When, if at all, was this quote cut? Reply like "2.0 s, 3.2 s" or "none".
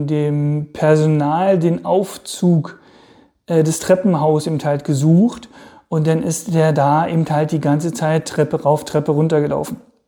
none